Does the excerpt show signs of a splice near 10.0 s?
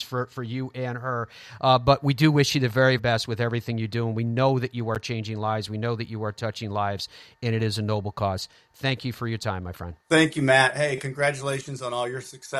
yes; 2 cuts; at 3.0 s, 10.0 s

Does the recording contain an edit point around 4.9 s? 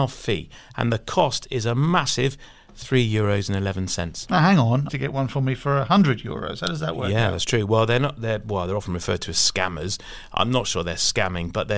yes; 1 cut; at 4.9 s

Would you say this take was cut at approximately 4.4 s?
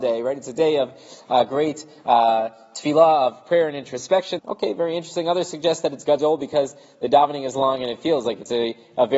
yes; 1 cut; at 4.4 s

